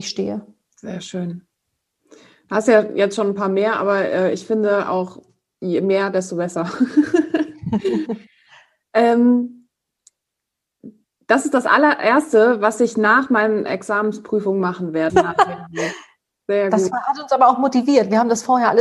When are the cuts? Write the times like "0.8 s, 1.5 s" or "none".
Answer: 15.1 s